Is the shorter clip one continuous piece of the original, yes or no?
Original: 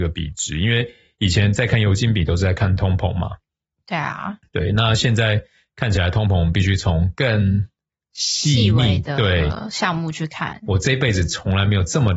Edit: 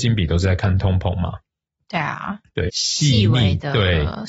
no